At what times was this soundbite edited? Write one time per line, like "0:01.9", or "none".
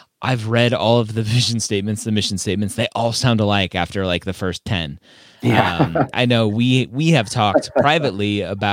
0:06.1

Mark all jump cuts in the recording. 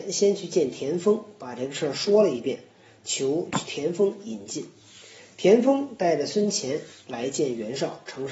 none

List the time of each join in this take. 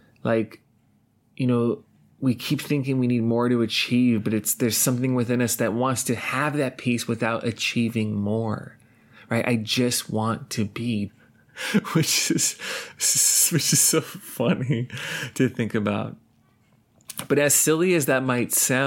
0:11.1

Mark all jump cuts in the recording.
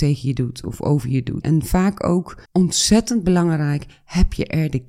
0:01.4
0:02.4

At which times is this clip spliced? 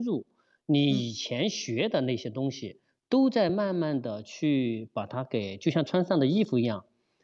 none

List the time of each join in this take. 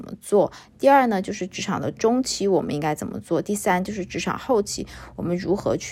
none

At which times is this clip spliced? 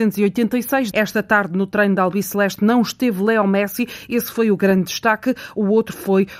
0:00.9

